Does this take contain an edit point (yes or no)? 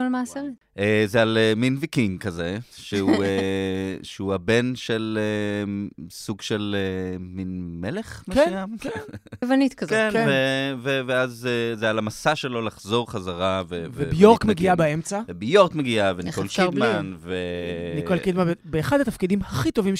yes